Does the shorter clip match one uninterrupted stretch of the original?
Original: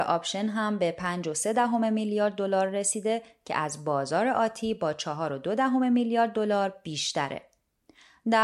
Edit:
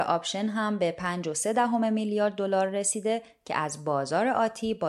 yes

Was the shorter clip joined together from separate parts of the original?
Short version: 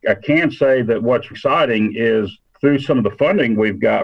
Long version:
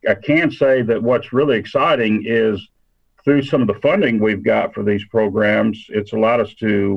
yes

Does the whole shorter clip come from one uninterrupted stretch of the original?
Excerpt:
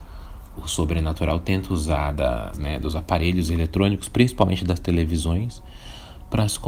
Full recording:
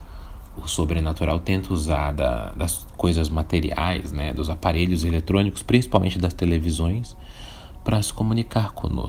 no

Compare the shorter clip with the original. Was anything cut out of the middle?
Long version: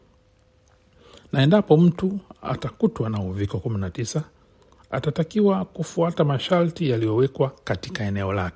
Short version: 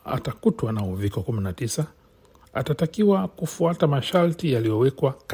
no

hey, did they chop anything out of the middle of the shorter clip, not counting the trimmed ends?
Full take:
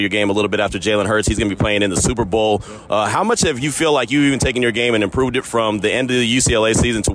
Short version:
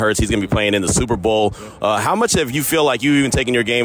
no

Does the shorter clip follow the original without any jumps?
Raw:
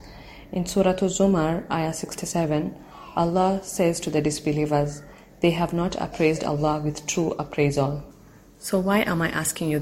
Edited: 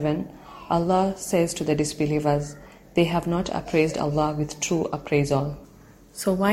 yes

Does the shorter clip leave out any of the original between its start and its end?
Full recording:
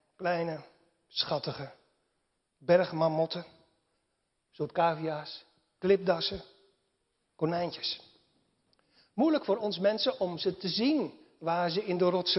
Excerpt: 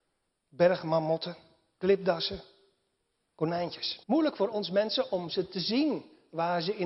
yes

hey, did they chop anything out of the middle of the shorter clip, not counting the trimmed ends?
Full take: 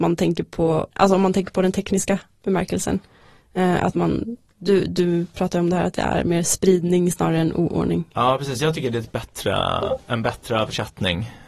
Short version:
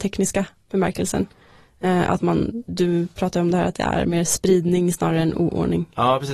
yes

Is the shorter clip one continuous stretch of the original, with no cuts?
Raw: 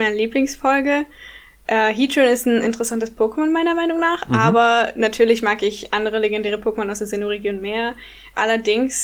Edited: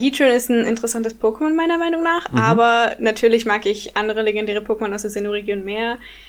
yes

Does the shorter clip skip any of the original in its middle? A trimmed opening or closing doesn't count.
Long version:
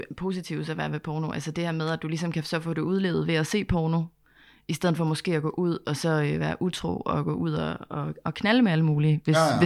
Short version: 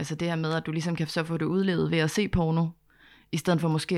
no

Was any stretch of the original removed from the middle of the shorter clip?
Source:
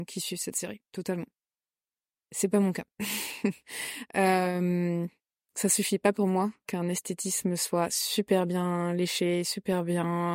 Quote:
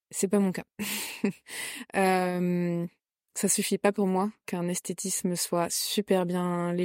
no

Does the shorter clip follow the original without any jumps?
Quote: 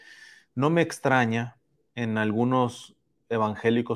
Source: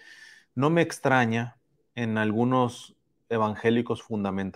yes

